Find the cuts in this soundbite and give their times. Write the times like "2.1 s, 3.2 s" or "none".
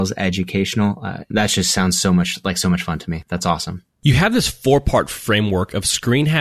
none

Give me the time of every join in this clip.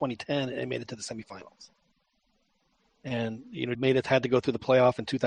3.8 s

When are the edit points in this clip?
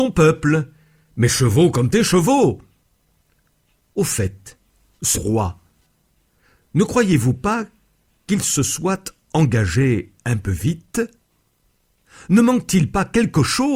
5.1 s

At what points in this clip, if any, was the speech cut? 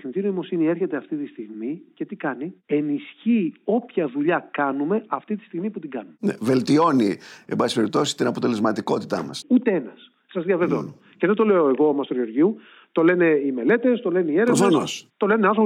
9.4 s

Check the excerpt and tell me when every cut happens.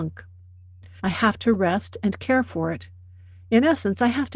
1.0 s

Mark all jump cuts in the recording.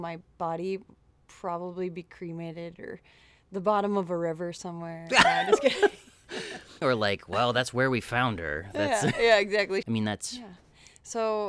6.8 s, 9.8 s

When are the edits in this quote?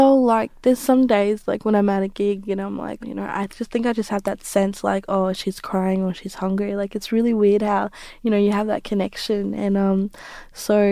3.0 s

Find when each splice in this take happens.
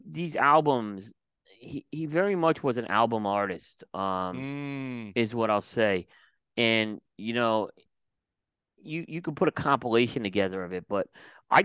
none

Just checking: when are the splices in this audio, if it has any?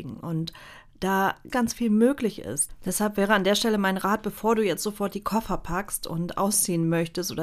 1.5 s

